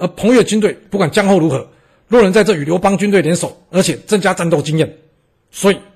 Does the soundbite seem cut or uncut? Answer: cut